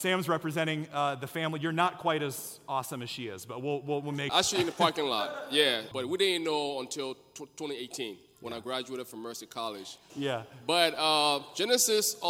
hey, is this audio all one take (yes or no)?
no